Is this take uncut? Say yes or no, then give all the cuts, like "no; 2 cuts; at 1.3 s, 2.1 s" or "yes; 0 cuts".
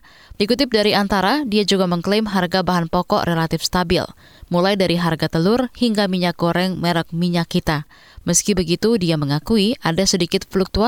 yes; 0 cuts